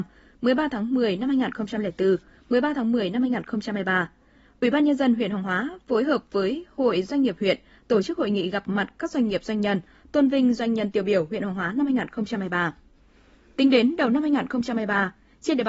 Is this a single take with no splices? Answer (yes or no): yes